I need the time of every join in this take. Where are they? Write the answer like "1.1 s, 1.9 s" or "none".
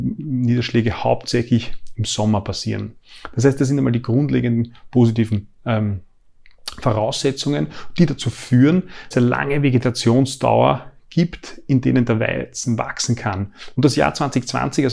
9.1 s, 13.7 s